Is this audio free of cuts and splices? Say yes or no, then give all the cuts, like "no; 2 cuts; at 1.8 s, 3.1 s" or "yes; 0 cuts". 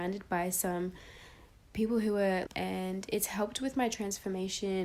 no; 1 cut; at 2.5 s